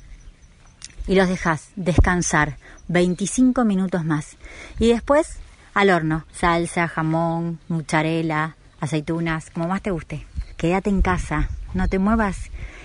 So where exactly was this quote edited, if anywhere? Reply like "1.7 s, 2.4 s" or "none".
6.3 s